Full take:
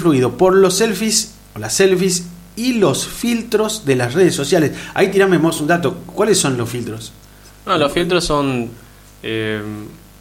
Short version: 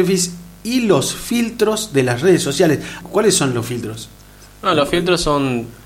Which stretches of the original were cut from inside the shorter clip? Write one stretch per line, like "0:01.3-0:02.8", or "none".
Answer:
0:04.9-0:06.0